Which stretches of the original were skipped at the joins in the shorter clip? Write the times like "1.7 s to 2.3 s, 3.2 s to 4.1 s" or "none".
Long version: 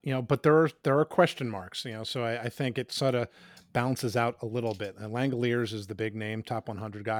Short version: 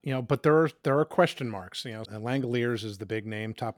2.1 s to 4.9 s